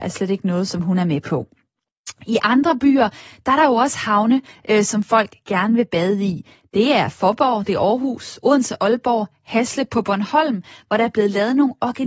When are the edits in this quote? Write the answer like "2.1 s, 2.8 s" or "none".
none